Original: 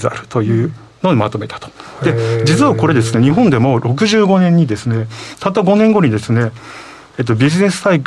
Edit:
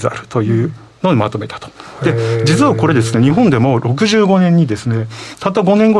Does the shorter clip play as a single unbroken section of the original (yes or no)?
yes